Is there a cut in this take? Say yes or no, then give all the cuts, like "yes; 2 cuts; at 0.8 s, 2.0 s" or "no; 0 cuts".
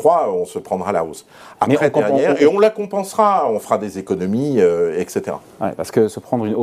no; 0 cuts